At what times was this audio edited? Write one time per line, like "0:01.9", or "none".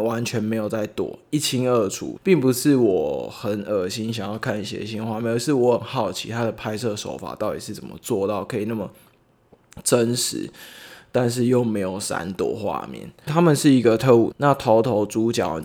0:02.2
0:14.3